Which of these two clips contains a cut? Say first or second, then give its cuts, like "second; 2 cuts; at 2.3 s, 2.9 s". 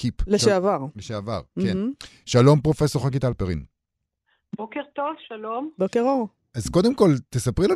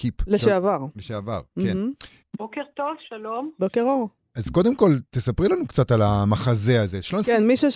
second; 1 cut; at 2.2 s